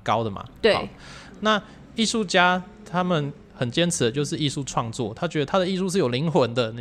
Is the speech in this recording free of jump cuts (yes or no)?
yes